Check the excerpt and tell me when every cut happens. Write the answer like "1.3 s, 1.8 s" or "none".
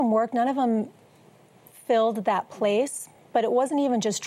none